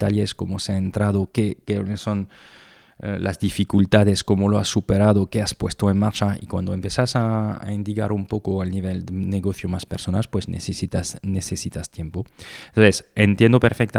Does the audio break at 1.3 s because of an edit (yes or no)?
no